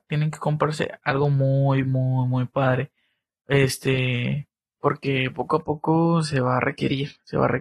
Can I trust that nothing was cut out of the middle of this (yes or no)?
yes